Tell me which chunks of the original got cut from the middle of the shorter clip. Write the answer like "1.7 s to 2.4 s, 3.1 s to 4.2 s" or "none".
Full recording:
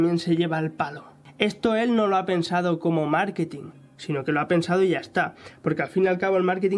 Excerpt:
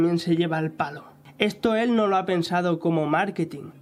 none